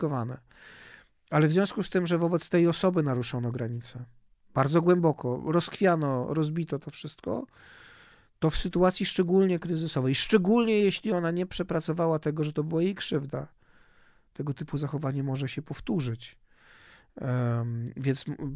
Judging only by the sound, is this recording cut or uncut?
uncut